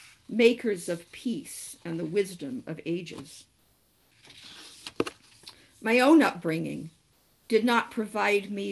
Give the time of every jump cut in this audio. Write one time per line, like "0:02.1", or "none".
none